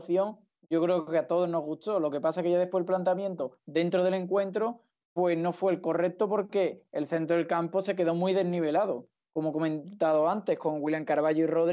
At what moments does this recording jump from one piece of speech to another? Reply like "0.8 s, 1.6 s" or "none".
none

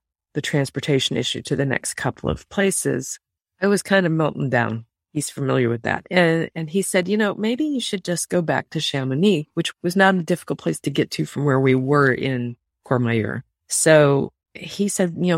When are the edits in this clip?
none

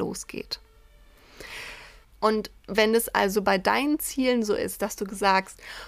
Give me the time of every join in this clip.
2.0 s

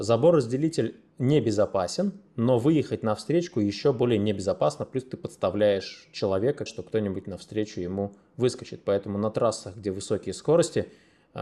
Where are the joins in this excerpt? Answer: 6.7 s

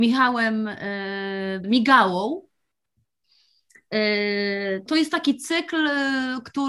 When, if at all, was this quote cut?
1.6 s, 4.9 s

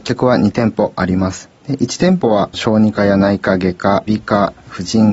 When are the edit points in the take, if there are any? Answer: 4.1 s

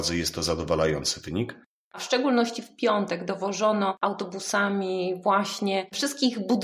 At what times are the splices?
1.8 s

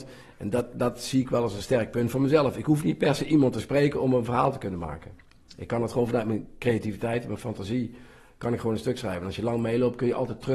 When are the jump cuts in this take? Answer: none

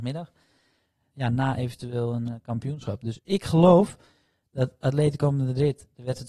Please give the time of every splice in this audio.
1.1 s

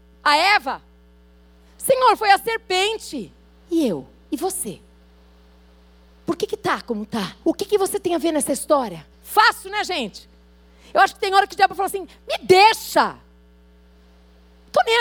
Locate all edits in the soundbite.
7.4 s, 9.1 s

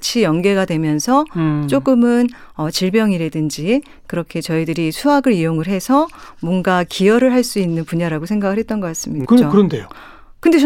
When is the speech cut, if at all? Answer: 9.2 s

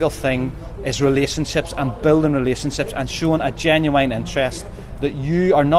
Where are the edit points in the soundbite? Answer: none

